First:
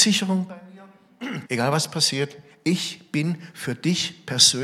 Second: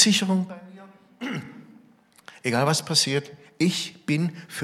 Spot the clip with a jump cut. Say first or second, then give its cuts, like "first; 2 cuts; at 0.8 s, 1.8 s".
first; 1 cut; at 1.4 s